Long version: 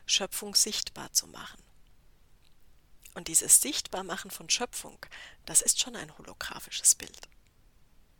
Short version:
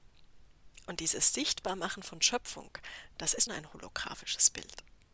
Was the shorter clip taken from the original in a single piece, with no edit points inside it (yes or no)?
no